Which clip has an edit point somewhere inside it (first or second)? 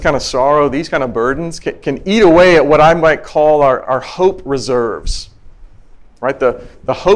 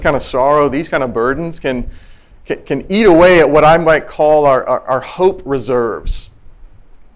first